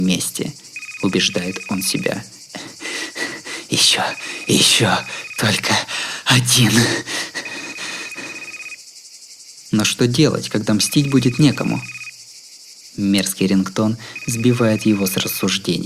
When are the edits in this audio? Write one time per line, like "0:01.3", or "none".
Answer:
none